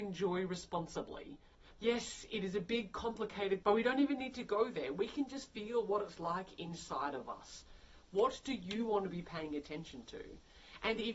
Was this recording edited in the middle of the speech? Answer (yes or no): yes